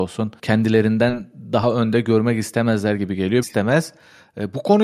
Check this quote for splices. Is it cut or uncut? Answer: cut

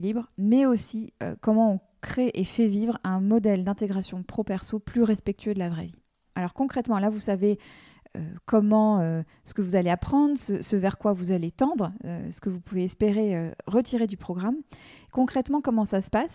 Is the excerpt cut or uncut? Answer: cut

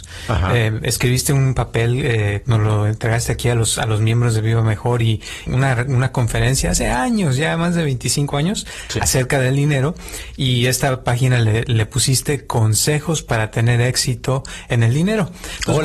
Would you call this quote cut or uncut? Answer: cut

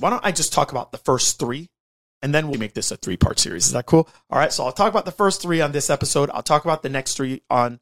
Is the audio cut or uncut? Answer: cut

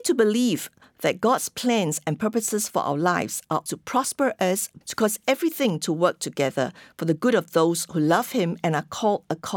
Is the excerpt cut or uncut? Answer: cut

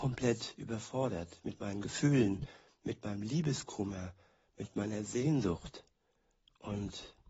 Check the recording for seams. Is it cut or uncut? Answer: uncut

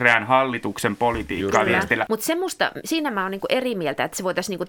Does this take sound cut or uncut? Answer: cut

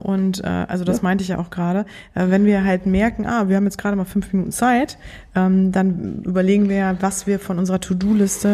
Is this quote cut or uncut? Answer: uncut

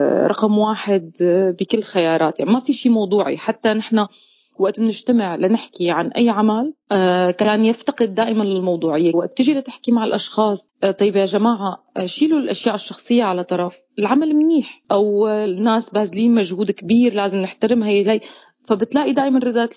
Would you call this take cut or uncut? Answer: cut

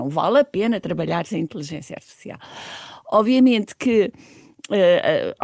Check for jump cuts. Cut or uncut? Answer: uncut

